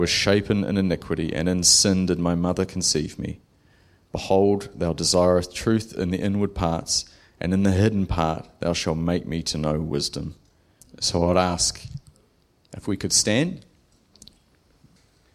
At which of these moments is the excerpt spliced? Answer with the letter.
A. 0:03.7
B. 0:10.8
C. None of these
B